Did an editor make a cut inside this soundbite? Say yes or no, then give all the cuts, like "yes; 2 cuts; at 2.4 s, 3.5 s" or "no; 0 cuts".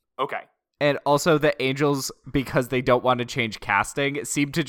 no; 0 cuts